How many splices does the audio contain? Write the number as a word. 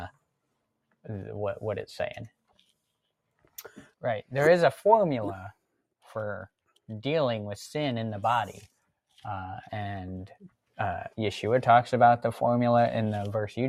three